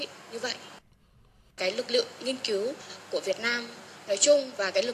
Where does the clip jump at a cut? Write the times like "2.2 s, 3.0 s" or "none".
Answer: 1.5 s